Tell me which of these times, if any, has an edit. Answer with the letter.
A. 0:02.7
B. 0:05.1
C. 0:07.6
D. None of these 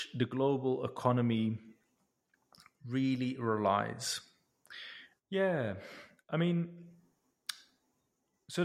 B